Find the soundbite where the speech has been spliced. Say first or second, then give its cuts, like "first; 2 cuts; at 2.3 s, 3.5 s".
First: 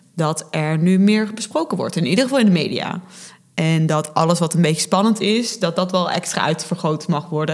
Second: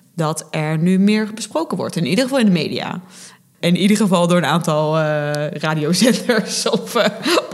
second; 1 cut; at 3.5 s